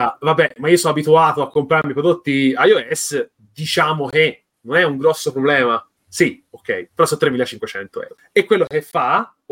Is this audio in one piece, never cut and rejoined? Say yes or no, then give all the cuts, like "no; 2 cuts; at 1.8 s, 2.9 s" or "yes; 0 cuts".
yes; 0 cuts